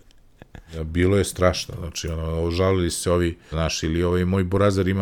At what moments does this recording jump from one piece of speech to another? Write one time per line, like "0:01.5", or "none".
0:03.5